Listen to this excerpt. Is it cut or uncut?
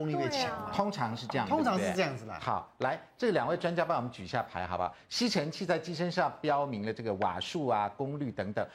uncut